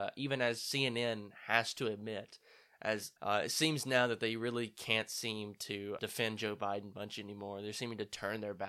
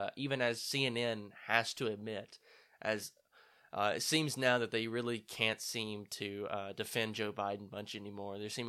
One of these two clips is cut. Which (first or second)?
first